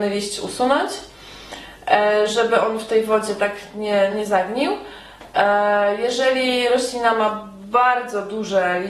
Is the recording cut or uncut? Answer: cut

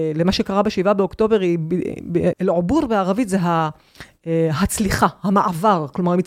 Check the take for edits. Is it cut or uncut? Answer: cut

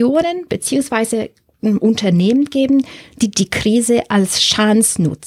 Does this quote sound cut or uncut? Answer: uncut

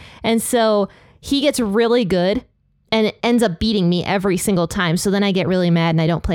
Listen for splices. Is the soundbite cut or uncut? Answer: uncut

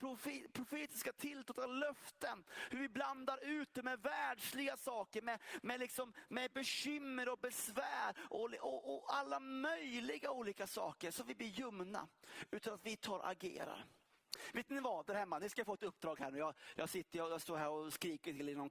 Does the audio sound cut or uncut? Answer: uncut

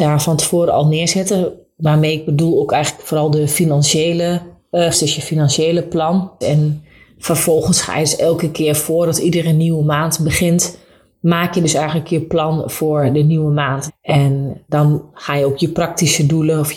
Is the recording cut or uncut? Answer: cut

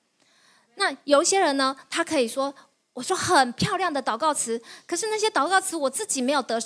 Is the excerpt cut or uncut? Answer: uncut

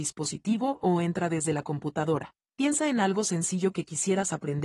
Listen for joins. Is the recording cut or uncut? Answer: uncut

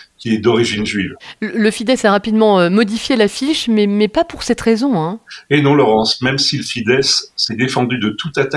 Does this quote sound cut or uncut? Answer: uncut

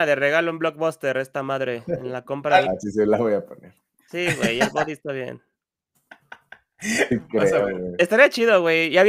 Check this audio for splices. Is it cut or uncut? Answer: cut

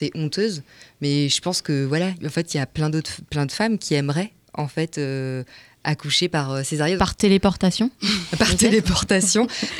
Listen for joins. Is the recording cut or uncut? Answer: cut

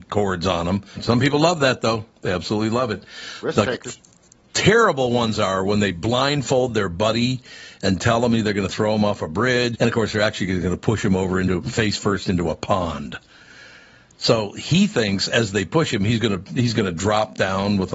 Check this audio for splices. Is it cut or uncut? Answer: cut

